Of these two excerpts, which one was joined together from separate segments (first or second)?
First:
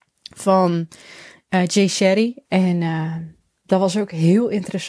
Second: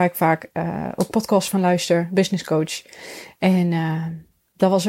first